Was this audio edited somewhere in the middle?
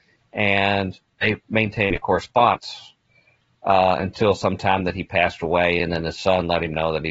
no; 0 cuts

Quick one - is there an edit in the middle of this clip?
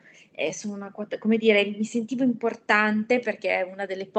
no; 0 cuts

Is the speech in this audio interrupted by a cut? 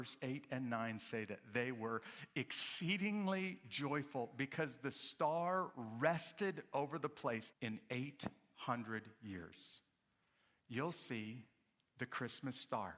yes; 1 cut; at 7.5 s

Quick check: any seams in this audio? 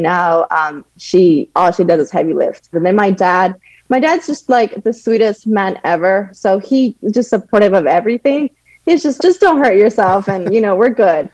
yes; 2 cuts; at 2.7 s, 9.2 s

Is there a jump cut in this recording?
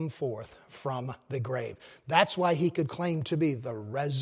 no; 0 cuts

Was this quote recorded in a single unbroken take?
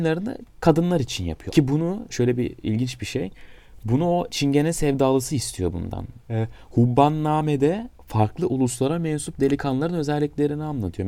no; 2 cuts; at 1.5 s, 6.3 s

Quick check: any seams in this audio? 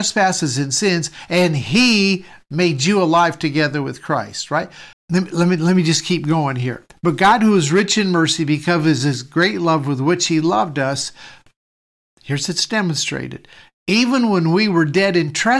yes; 1 cut; at 4.9 s

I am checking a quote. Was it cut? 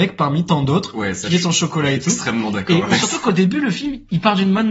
no; 0 cuts

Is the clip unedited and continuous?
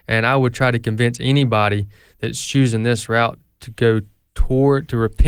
yes; 0 cuts

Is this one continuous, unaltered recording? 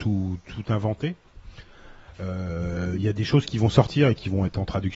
yes; 0 cuts

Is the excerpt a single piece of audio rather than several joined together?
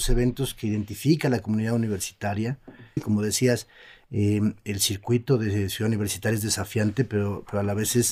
no; 1 cut; at 3.0 s

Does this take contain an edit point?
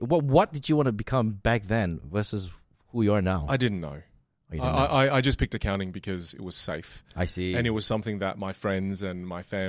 no; 0 cuts

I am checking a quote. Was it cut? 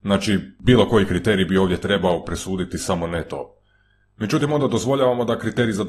no; 0 cuts

